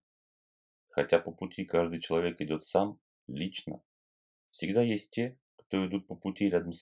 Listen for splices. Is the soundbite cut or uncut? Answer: uncut